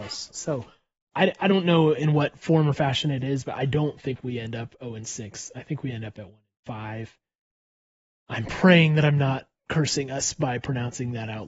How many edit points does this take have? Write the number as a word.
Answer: zero